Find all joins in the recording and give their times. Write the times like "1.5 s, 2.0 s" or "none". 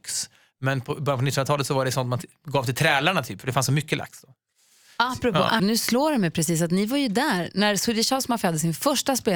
5.6 s